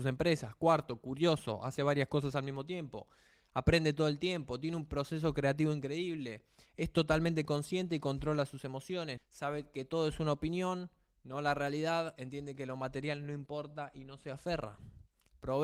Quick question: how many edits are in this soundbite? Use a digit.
1